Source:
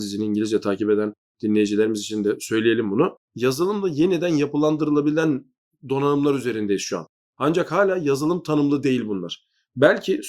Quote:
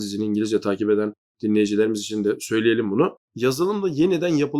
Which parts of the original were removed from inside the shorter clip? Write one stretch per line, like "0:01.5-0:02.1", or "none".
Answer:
none